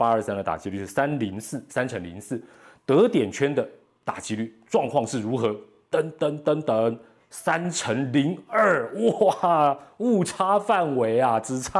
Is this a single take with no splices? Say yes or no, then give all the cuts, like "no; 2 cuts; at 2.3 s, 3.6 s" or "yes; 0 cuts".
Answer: yes; 0 cuts